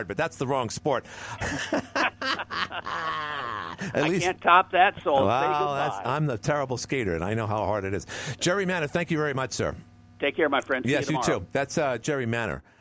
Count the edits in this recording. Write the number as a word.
one